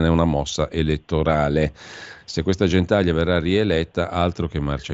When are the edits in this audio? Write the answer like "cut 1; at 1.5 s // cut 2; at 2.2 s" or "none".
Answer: none